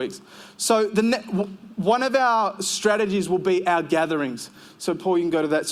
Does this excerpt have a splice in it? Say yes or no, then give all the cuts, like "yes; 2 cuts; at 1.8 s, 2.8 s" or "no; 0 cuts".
no; 0 cuts